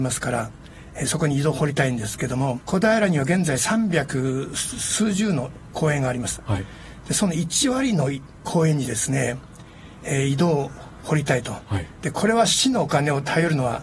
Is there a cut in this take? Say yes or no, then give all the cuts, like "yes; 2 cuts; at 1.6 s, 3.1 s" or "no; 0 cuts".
yes; 1 cut; at 2.6 s